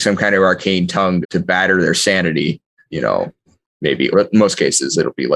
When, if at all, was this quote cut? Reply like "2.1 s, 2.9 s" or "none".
1.2 s, 2.9 s, 4.1 s